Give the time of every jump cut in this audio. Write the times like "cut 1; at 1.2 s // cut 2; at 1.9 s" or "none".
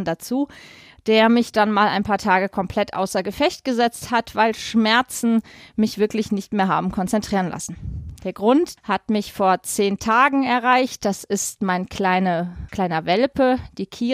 cut 1; at 8.8 s // cut 2; at 12.7 s

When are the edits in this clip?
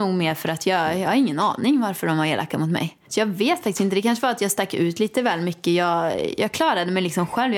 cut 1; at 3.0 s

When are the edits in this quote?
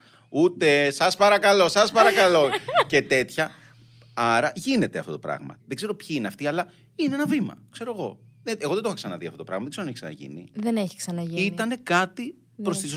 cut 1; at 5.6 s

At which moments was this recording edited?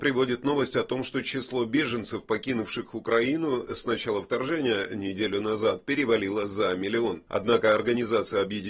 cut 1; at 7.3 s

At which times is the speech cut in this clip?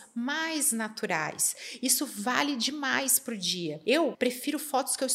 cut 1; at 4.1 s

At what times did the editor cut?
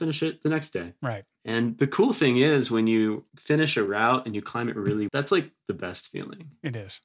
cut 1; at 3.3 s // cut 2; at 5.1 s

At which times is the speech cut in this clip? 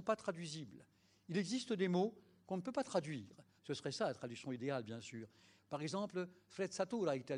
cut 1; at 3.6 s // cut 2; at 5.6 s

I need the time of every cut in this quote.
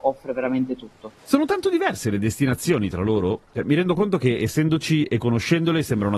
cut 1; at 1.2 s

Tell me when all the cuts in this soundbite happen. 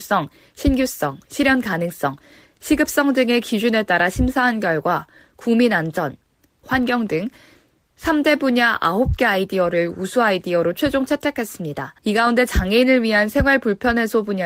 cut 1; at 6.6 s // cut 2; at 12.0 s

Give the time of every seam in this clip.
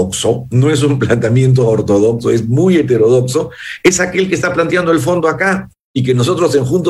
none

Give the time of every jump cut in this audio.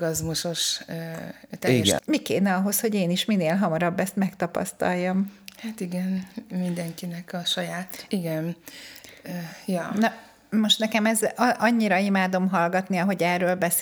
cut 1; at 2.0 s // cut 2; at 8.1 s

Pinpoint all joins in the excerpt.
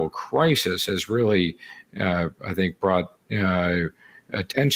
none

